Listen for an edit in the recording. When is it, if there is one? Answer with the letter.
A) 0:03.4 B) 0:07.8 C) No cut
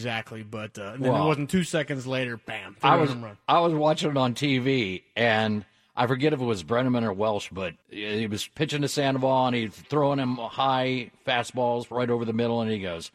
B